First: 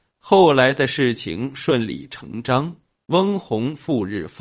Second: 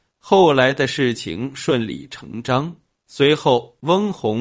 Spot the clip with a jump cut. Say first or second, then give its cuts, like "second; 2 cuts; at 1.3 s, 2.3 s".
second; 1 cut; at 3.0 s